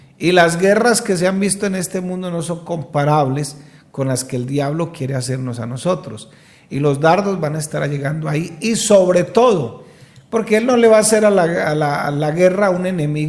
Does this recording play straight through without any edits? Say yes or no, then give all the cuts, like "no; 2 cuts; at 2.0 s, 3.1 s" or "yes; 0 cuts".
yes; 0 cuts